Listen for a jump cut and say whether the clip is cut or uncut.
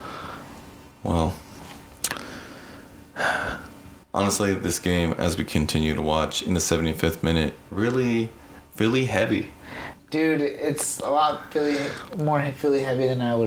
cut